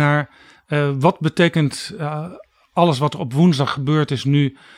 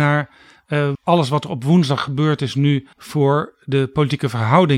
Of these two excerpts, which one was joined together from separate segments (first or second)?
second